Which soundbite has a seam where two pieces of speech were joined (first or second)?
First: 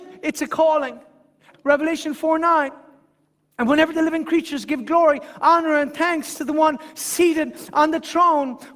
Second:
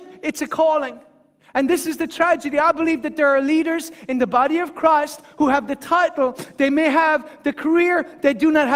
first